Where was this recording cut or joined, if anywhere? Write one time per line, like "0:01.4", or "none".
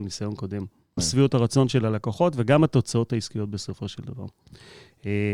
0:01.0